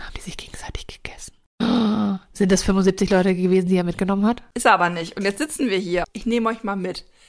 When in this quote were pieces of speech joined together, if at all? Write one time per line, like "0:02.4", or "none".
0:04.5
0:06.0

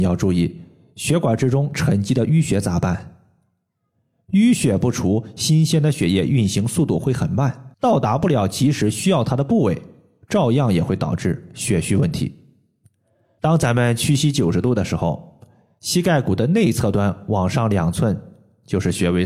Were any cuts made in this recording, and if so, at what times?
0:07.7
0:13.4

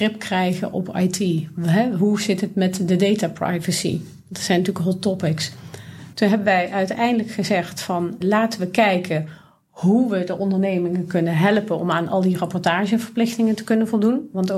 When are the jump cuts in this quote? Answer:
0:06.1
0:08.2

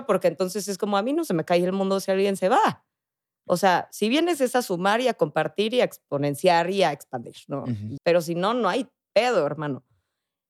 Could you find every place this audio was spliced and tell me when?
0:08.0

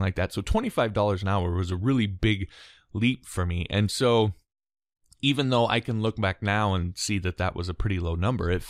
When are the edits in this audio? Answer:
none

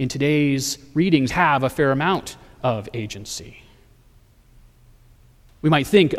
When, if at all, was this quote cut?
0:01.3

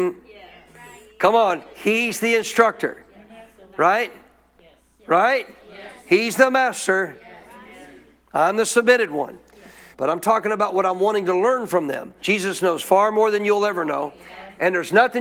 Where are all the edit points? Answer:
0:07.4
0:09.9
0:12.2

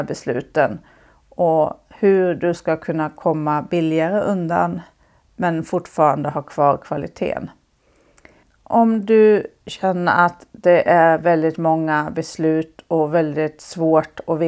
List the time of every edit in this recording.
0:08.4

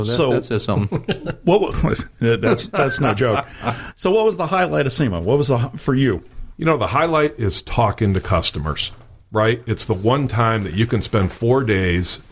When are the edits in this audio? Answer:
none

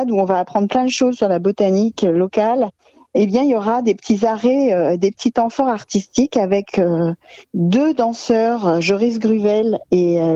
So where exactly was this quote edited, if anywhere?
none

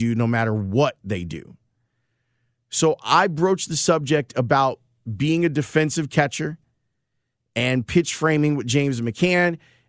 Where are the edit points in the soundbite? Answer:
none

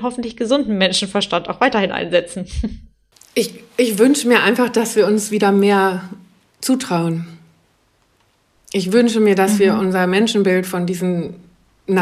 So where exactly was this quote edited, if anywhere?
none

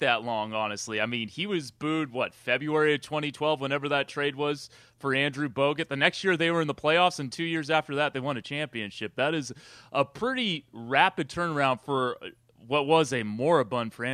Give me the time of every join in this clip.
none

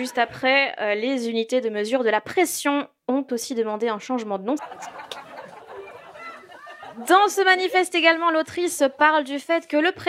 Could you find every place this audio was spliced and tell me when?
0:04.6

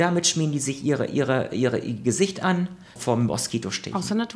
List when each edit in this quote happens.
0:03.0

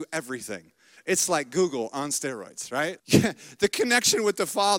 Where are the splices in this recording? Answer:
0:03.0

